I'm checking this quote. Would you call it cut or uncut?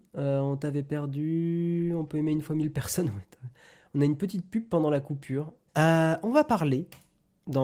cut